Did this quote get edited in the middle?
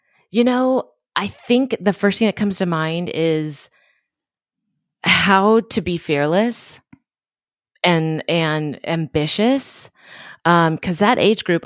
no; 0 cuts

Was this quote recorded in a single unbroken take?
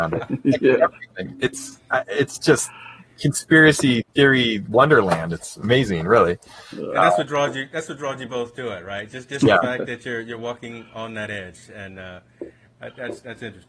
yes; 0 cuts

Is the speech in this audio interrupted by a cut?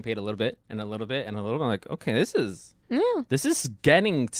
yes; 1 cut; at 2.8 s

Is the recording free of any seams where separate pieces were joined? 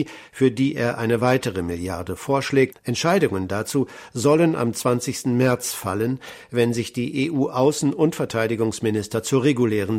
no; 1 cut; at 2.7 s

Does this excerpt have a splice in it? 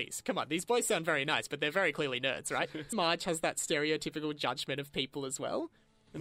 yes; 1 cut; at 2.9 s

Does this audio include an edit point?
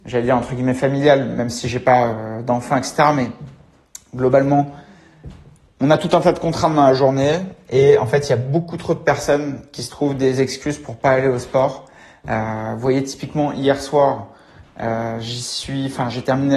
no; 0 cuts

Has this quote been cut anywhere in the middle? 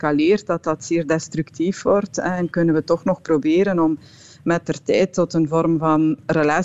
no; 0 cuts

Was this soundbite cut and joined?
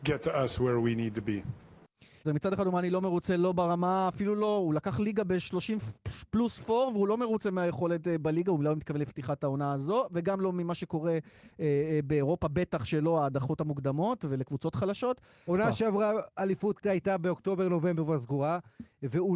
yes; 2 cuts; at 2.2 s, 15.5 s

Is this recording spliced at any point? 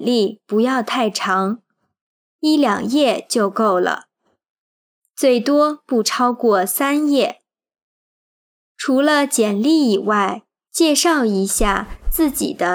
yes; 1 cut; at 10.7 s

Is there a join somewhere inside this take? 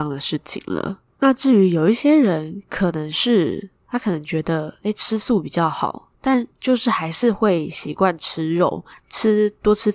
yes; 1 cut; at 9.0 s

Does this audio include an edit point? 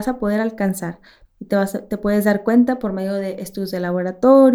yes; 1 cut; at 1.2 s

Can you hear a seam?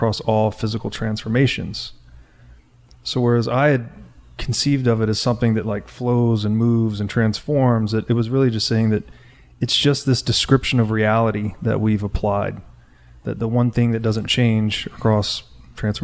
no; 0 cuts

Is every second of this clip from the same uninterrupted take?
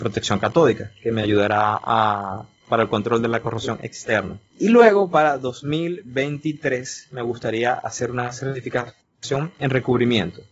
yes; 0 cuts

